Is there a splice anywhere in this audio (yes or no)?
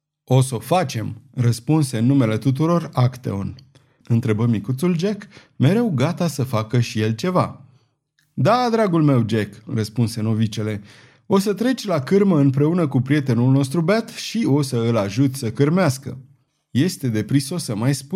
yes